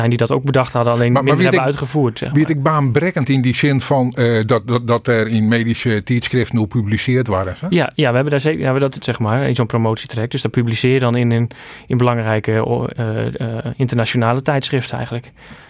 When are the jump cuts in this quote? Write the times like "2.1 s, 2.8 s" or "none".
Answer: 9.0 s